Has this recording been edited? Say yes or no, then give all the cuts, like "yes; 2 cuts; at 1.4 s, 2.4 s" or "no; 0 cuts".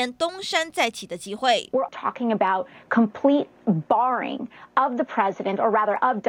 yes; 1 cut; at 1.9 s